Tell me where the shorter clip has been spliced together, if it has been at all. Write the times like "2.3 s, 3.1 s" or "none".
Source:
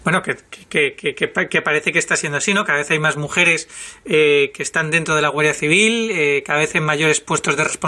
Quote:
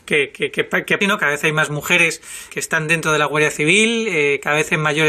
1.0 s, 2.5 s